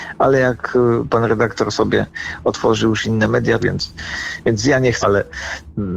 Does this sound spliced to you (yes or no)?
yes